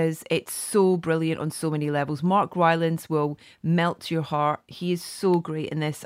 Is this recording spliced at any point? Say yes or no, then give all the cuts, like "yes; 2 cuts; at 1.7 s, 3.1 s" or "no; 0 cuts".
no; 0 cuts